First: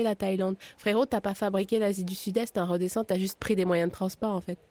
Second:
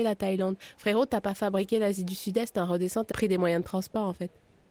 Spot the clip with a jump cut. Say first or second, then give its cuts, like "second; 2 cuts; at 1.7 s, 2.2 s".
second; 1 cut; at 3.1 s